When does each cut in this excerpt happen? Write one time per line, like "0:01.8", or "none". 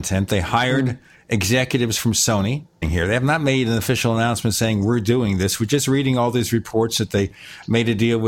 0:02.8